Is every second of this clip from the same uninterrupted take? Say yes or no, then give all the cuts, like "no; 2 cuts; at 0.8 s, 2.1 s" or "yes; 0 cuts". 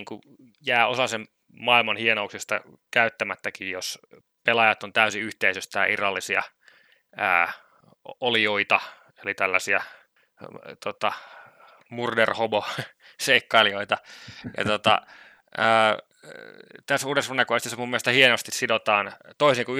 yes; 0 cuts